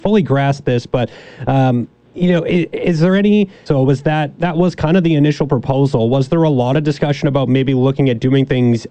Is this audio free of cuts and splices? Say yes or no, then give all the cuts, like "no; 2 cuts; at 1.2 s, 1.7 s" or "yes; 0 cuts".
no; 1 cut; at 3.7 s